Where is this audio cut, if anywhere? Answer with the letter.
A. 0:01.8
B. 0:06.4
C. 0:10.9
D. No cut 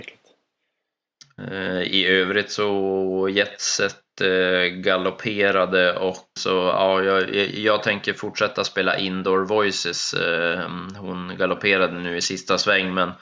B